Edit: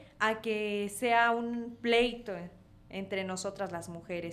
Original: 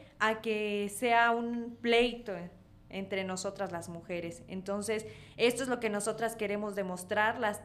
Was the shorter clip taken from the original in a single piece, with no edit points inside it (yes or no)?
yes